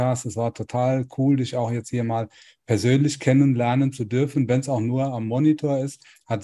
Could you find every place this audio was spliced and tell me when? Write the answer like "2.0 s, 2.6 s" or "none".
none